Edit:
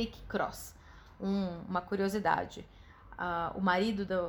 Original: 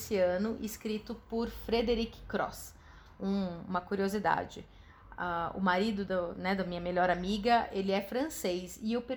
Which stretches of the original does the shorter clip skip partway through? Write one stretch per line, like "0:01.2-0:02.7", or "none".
none